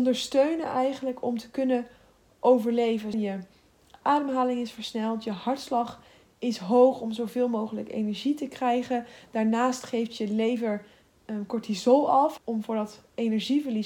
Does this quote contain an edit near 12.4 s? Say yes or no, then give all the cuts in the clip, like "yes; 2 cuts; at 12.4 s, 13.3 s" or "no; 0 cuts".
yes; 2 cuts; at 3.1 s, 12.4 s